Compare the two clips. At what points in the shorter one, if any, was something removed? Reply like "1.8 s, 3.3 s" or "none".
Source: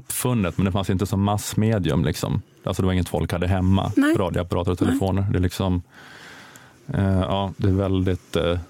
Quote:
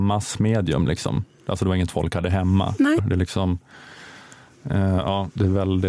3.0 s